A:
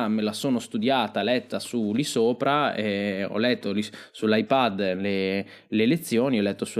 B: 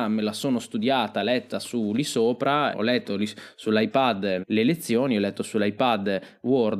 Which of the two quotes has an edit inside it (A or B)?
B